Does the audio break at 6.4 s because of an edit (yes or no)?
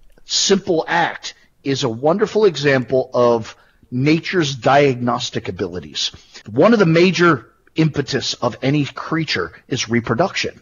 yes